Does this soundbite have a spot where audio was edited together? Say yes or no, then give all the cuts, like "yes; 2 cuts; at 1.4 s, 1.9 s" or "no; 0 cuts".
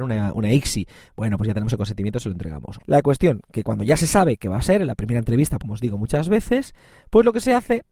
yes; 2 cuts; at 2.8 s, 5.6 s